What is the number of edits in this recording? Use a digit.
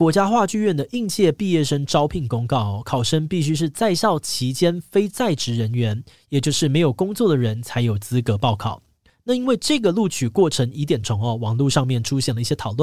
2